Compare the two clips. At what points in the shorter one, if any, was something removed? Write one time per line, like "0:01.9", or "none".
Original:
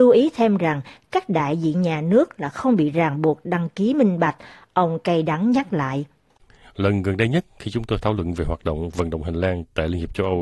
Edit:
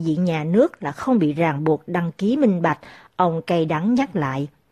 none